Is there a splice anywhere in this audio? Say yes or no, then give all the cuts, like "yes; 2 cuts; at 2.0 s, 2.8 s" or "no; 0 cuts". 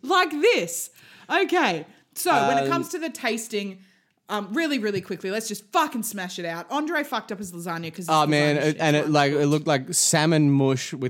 no; 0 cuts